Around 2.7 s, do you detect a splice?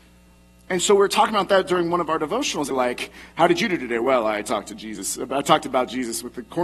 yes; 1 cut; at 2.7 s

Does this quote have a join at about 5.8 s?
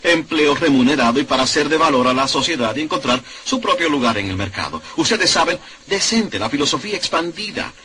yes; 1 cut; at 5.8 s

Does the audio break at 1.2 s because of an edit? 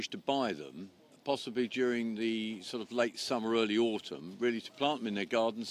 no; 0 cuts

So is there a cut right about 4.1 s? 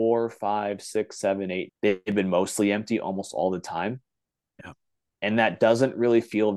no; 1 cut; at 1.7 s

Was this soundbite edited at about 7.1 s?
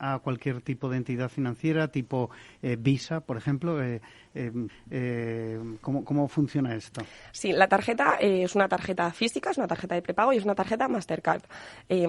no; 1 cut; at 4.7 s

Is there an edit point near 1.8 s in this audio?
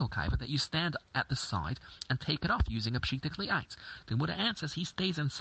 no; 1 cut; at 4.0 s

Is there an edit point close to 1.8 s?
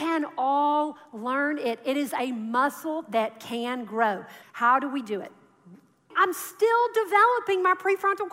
no; 2 cuts; at 4.4 s, 6.1 s

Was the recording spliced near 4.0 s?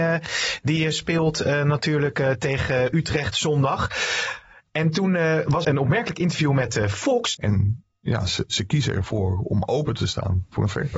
no; 2 cuts; at 5.6 s, 7.3 s

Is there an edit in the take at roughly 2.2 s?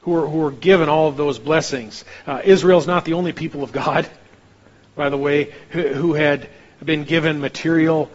no; 0 cuts

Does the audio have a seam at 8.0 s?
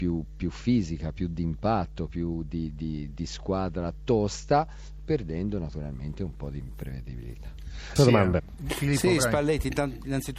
yes; 1 cut; at 8.0 s

